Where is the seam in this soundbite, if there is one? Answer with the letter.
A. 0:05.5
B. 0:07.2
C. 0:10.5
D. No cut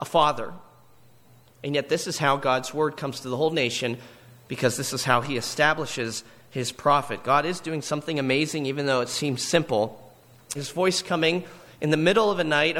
C